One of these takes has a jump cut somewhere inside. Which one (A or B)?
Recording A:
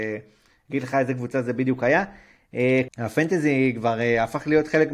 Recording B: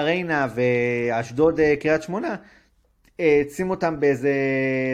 A